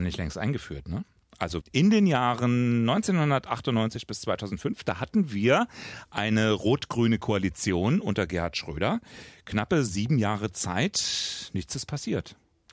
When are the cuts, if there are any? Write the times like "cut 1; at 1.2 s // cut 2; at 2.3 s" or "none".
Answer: cut 1; at 1.6 s